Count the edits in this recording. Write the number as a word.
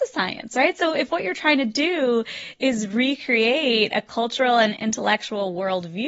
zero